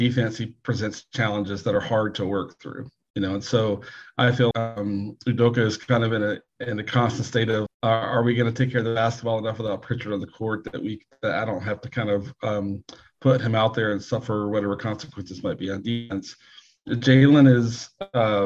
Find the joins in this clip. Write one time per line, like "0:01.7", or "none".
0:04.5
0:07.7